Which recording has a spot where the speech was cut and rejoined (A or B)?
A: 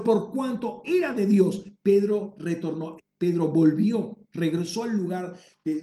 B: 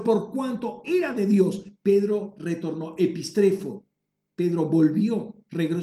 A